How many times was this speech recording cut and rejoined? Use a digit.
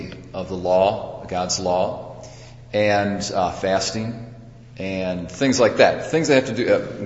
0